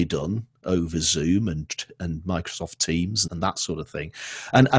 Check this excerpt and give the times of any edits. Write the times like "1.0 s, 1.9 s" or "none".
3.3 s

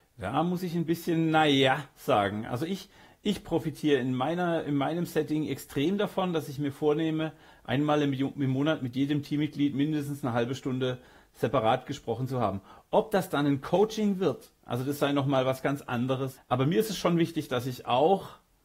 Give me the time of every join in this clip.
16.4 s

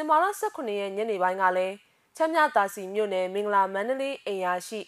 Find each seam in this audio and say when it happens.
none

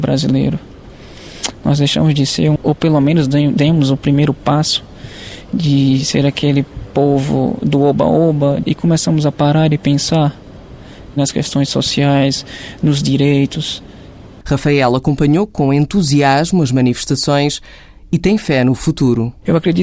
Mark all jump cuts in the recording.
2.6 s, 8.6 s, 14.4 s

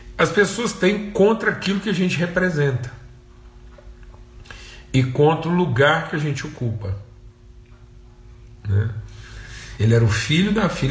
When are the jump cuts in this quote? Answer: 9.8 s

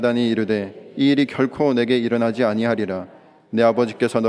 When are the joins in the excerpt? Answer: none

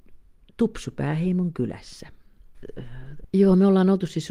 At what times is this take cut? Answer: 3.2 s

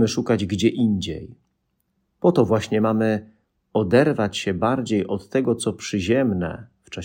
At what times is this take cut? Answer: none

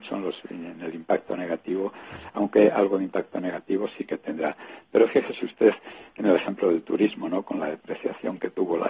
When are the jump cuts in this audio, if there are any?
none

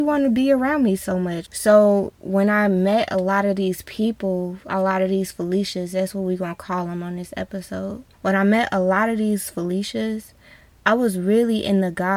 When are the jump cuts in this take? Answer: 1.4 s, 8.1 s

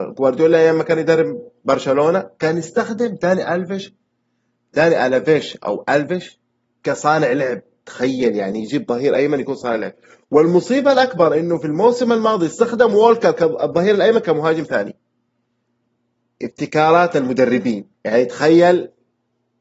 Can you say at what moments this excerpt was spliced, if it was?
17.9 s

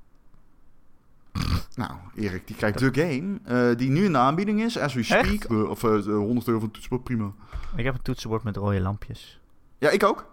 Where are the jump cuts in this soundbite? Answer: 2.8 s, 5.5 s

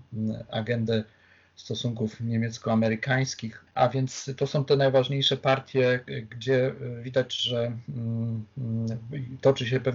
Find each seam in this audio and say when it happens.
3.7 s

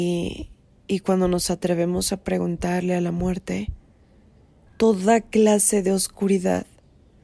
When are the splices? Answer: 4.7 s

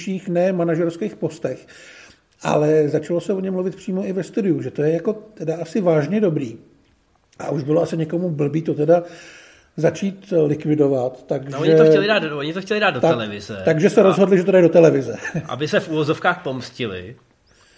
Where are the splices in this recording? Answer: none

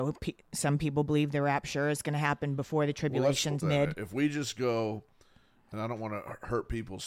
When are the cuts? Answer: 3.6 s

